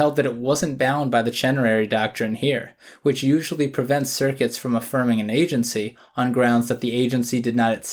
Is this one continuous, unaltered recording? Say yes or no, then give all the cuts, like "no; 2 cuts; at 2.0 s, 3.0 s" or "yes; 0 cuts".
yes; 0 cuts